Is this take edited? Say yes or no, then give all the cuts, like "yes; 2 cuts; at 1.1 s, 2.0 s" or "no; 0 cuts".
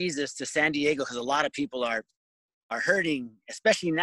no; 0 cuts